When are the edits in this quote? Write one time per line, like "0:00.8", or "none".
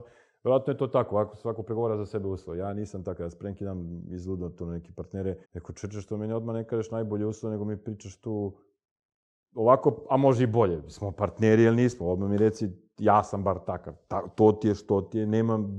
0:05.4